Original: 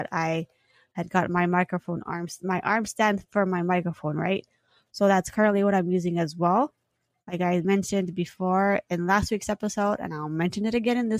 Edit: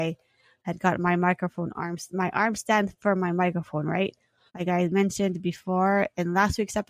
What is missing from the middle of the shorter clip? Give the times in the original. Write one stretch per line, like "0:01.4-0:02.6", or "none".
0:04.8-0:07.2